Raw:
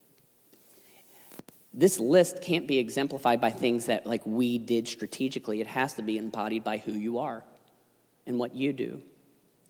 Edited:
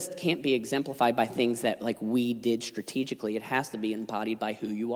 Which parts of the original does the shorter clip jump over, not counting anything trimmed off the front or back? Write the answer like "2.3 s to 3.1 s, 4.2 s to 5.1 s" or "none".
none

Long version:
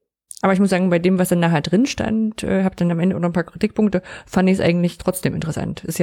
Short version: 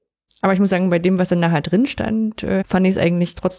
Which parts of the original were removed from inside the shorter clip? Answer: 2.6 s to 4.2 s

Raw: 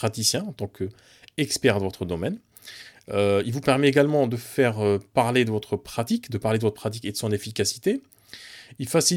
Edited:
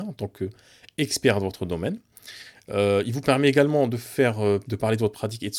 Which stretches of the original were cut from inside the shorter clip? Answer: 5.0 s to 6.3 s

